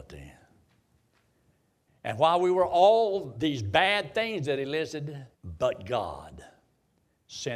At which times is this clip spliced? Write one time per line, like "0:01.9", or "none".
0:01.9
0:05.3